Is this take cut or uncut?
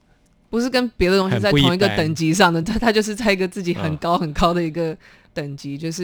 uncut